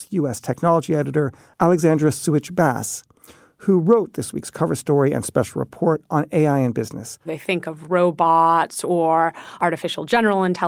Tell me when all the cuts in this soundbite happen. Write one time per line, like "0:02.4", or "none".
0:07.2